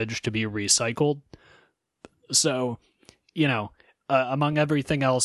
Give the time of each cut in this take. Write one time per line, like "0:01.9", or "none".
none